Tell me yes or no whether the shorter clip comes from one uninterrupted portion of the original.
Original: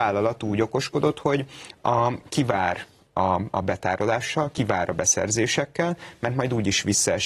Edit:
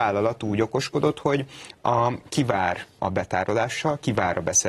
no